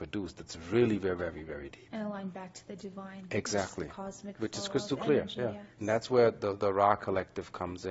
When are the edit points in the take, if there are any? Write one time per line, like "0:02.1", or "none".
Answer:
none